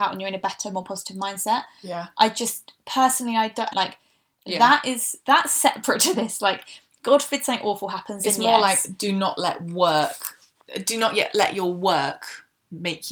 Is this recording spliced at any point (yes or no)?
yes